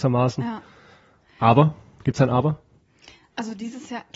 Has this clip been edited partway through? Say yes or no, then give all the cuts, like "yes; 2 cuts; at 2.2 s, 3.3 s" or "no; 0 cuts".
no; 0 cuts